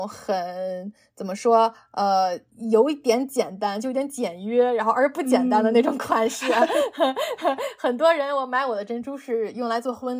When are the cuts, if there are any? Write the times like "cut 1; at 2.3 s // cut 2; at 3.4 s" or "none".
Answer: none